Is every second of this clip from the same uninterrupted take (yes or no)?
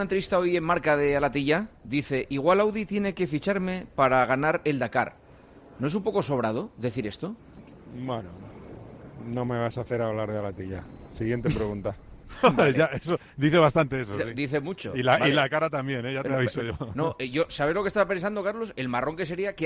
yes